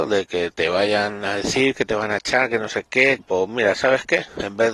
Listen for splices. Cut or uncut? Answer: cut